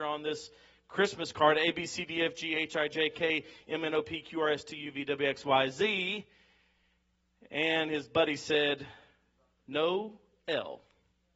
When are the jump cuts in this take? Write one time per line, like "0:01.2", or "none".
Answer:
none